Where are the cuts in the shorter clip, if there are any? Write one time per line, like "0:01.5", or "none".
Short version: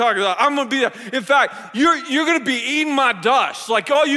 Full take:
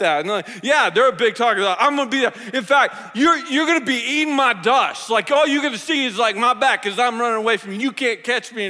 none